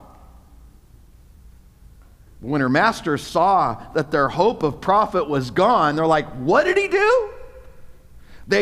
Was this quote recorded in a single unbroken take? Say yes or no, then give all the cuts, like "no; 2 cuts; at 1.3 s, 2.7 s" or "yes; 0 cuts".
yes; 0 cuts